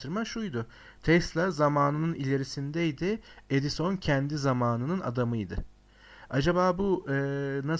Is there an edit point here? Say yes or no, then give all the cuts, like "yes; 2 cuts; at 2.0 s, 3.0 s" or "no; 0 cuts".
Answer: no; 0 cuts